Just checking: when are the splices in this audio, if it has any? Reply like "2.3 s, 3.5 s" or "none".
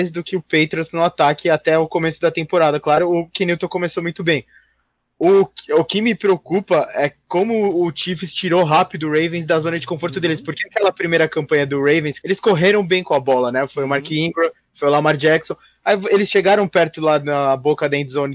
12.2 s